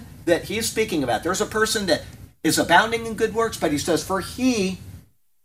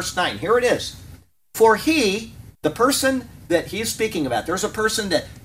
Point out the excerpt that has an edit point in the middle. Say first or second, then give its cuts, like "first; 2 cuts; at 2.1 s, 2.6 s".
second; 1 cut; at 2.5 s